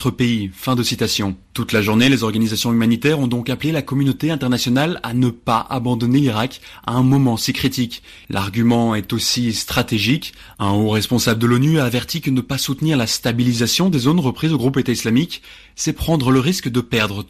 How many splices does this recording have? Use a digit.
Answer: 0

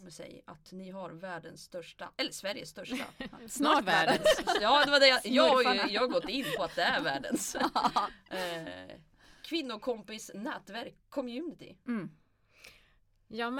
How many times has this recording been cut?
0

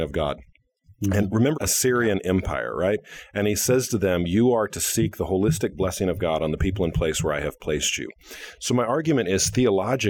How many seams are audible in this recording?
1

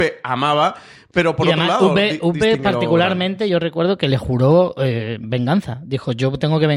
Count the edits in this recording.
0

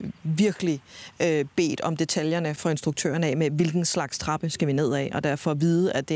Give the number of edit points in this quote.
1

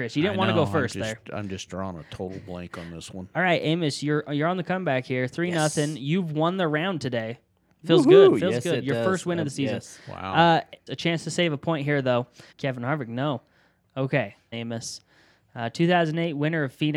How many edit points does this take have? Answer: 3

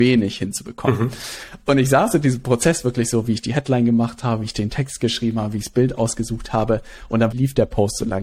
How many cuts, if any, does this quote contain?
1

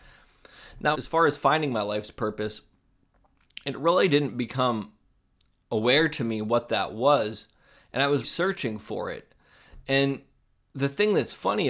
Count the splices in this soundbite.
2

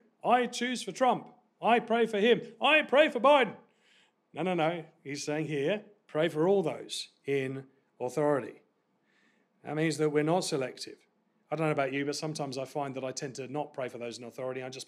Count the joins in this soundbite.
0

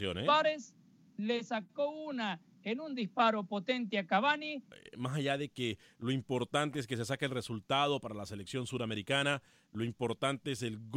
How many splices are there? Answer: 1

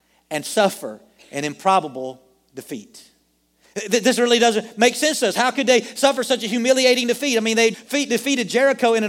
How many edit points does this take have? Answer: 1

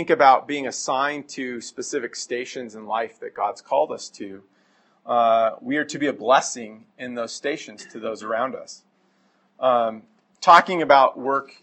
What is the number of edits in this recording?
0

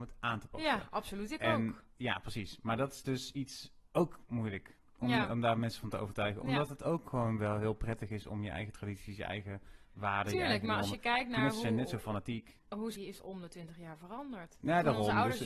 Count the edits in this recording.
2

